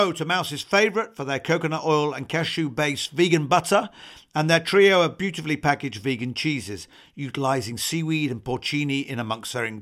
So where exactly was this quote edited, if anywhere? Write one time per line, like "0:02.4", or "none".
none